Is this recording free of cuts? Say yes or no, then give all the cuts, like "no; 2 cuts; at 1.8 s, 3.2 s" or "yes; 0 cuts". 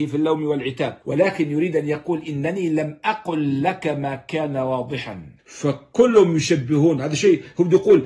no; 2 cuts; at 1.0 s, 5.4 s